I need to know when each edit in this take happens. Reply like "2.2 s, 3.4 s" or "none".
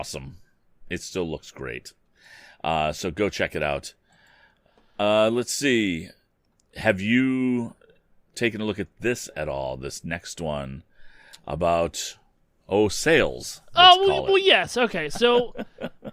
none